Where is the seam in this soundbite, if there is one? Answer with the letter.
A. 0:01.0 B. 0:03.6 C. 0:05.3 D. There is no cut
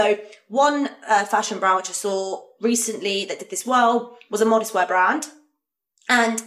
D